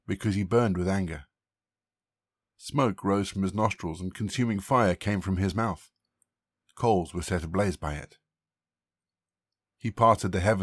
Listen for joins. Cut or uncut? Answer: uncut